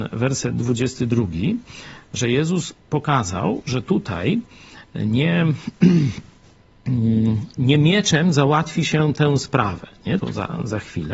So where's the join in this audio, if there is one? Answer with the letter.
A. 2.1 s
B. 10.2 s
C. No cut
B